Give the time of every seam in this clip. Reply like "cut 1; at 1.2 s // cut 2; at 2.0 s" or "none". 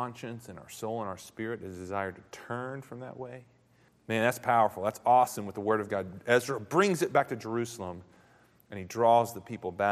cut 1; at 3.9 s